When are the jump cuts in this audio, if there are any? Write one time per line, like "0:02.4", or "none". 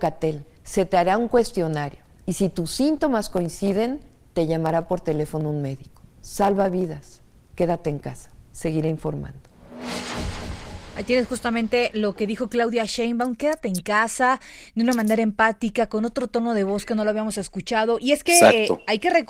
none